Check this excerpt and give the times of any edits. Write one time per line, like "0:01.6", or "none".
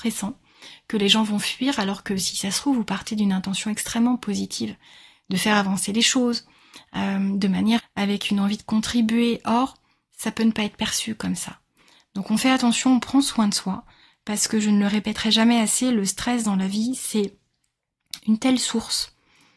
0:07.8